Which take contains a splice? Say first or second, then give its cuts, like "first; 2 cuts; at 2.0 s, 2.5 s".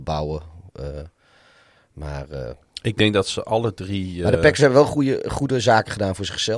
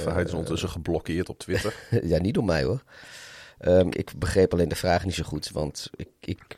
second; 1 cut; at 3.9 s